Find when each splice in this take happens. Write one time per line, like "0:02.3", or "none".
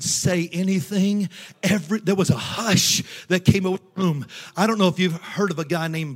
none